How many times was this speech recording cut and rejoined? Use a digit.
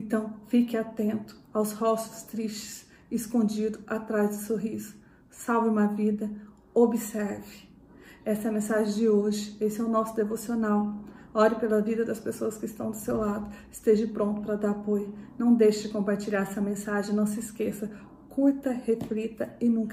0